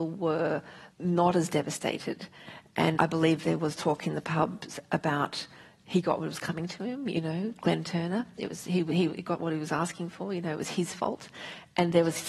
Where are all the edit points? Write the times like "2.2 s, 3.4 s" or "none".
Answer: 0.9 s, 3.0 s